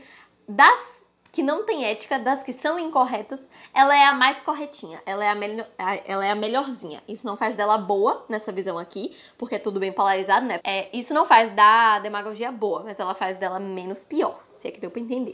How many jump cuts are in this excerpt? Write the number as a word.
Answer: one